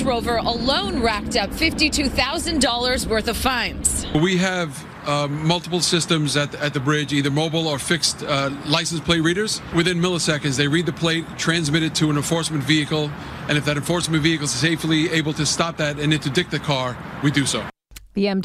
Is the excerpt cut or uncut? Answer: uncut